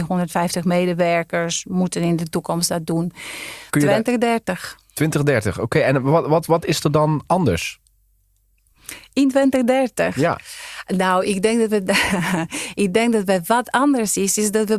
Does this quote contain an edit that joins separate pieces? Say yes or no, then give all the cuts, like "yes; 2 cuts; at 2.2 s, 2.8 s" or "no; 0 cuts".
yes; 1 cut; at 3.7 s